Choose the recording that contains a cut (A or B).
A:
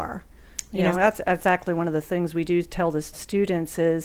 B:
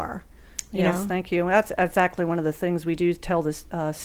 A